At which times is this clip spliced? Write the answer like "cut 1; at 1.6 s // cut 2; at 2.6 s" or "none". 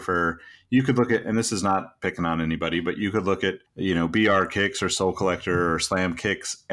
cut 1; at 3.7 s

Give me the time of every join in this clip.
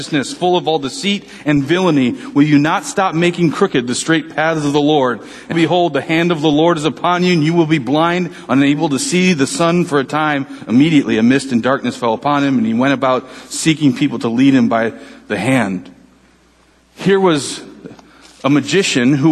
cut 1; at 5.5 s

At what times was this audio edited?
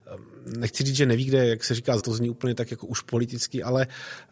cut 1; at 2.0 s

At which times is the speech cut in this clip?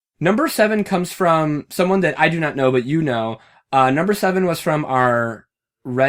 none

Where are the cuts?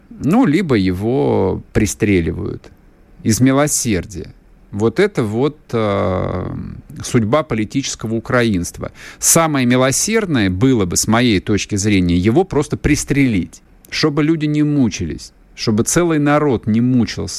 none

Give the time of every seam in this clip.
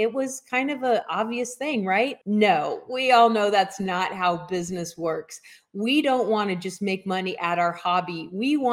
cut 1; at 2.2 s

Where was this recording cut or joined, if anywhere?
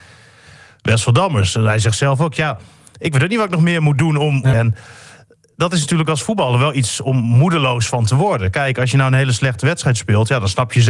cut 1; at 4.5 s

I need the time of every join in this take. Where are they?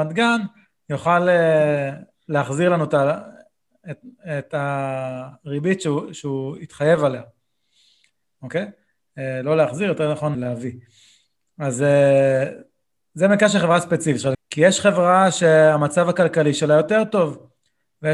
cut 1; at 10.3 s // cut 2; at 14.3 s

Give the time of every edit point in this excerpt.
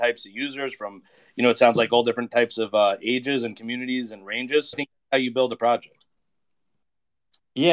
cut 1; at 4.7 s

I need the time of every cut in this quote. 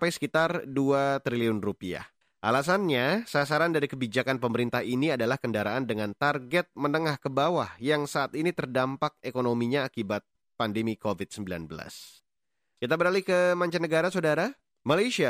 cut 1; at 2.2 s

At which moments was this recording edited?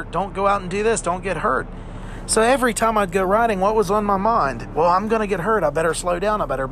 none

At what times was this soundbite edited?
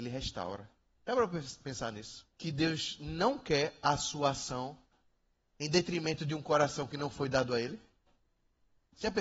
cut 1; at 1.0 s // cut 2; at 2.3 s

